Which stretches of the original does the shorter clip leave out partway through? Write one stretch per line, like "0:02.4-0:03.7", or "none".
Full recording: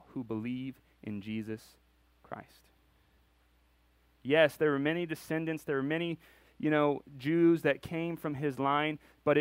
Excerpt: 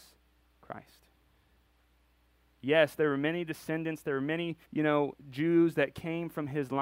0:06.3-0:06.5